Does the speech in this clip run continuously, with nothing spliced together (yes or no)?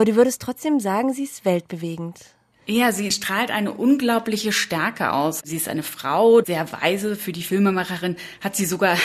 no